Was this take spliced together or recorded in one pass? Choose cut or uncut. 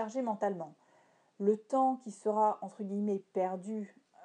uncut